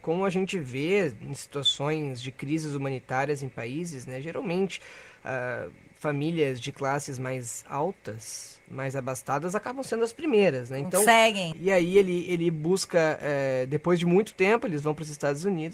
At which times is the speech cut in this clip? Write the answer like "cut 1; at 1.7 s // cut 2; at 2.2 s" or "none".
cut 1; at 11.5 s